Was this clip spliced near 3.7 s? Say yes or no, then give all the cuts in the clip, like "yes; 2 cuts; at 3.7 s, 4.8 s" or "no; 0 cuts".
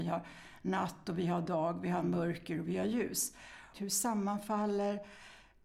yes; 1 cut; at 3.7 s